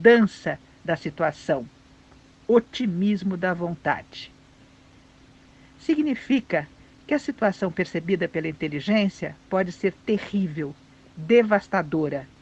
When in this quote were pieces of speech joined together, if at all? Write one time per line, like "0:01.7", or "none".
0:05.6